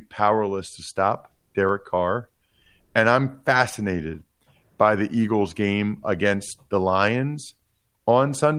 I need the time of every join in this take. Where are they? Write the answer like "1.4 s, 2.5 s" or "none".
none

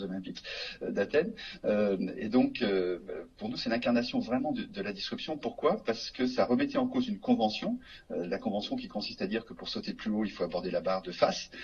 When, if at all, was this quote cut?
none

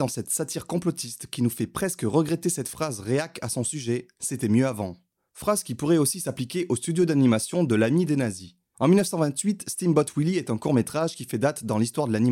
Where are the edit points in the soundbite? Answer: none

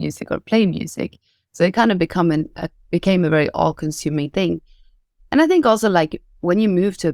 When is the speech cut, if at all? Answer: none

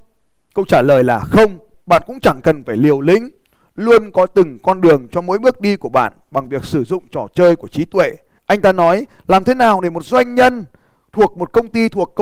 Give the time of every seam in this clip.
1.7 s, 8.4 s

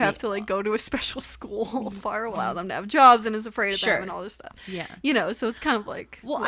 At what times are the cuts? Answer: 2.3 s

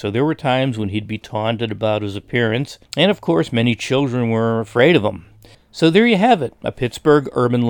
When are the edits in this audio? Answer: 2.8 s, 5.5 s

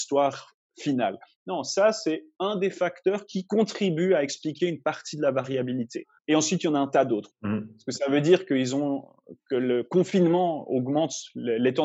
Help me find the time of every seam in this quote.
6.2 s, 7.3 s

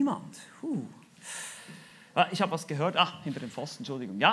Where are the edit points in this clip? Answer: none

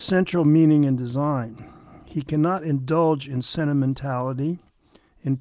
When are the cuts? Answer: none

